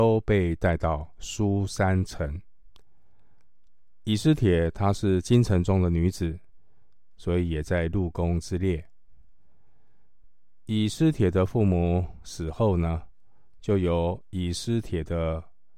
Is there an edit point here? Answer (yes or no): no